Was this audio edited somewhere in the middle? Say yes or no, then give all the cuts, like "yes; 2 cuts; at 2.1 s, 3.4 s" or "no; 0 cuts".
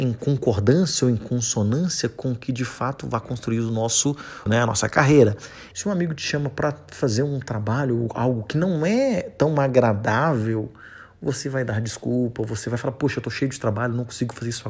yes; 2 cuts; at 4.5 s, 5.7 s